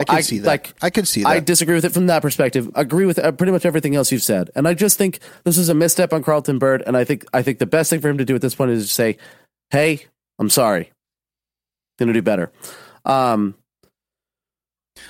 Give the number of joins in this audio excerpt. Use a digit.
1